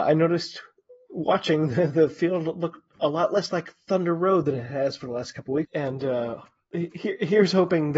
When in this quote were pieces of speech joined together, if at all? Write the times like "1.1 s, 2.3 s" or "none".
5.6 s